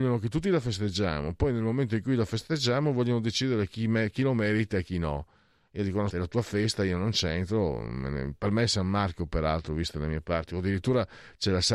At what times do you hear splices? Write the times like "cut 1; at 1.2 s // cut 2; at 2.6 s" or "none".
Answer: cut 1; at 6.1 s